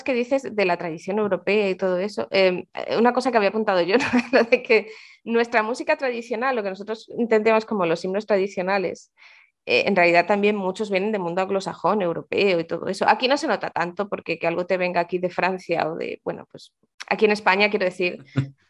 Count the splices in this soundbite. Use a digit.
0